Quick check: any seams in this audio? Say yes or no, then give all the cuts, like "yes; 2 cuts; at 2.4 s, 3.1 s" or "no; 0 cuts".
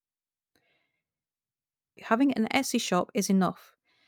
yes; 1 cut; at 2.0 s